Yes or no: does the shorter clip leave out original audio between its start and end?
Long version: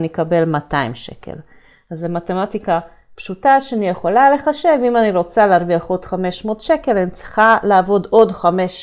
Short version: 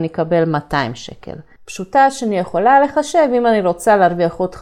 yes